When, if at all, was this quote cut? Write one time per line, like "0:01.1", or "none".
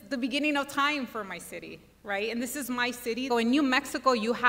0:03.3